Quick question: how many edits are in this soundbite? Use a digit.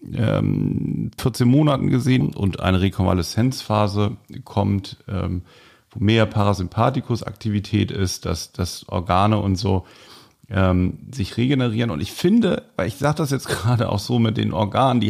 2